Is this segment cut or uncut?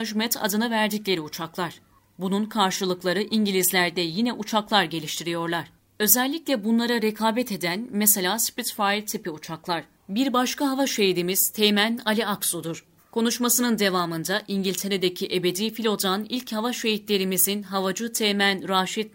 cut